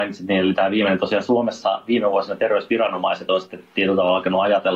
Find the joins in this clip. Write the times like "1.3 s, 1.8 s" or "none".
none